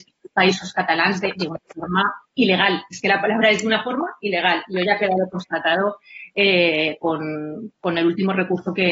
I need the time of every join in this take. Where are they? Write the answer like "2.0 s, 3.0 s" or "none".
none

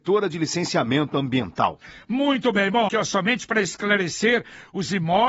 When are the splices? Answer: 2.9 s

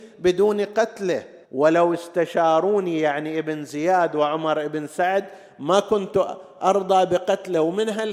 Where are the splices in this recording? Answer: 1.4 s

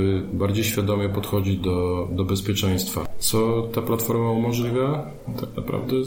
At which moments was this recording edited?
none

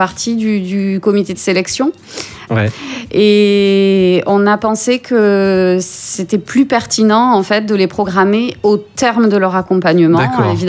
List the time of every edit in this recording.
2.5 s

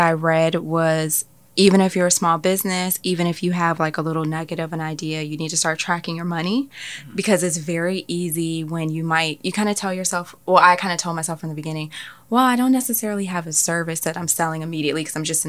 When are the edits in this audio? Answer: none

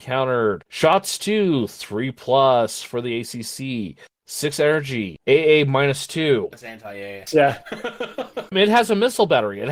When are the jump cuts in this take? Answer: 7.3 s, 8.5 s

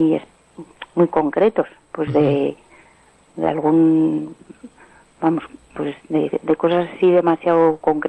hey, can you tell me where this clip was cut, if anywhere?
none

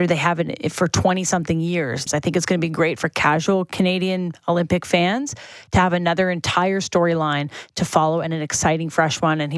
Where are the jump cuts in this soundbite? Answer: 2.1 s

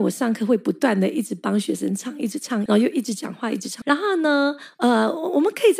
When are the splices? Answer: 2.7 s, 3.8 s

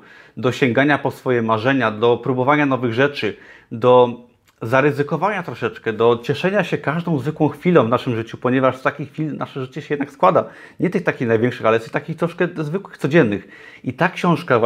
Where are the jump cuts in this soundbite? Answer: none

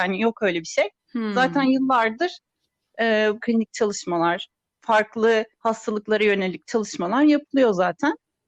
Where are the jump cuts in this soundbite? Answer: 3.4 s, 5.5 s

